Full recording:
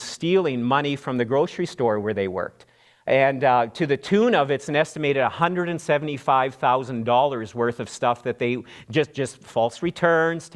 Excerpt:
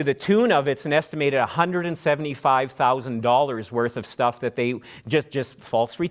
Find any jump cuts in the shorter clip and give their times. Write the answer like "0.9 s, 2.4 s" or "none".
none